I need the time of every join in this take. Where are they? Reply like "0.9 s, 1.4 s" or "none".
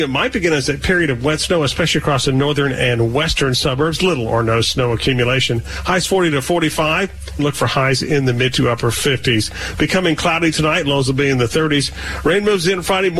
7.4 s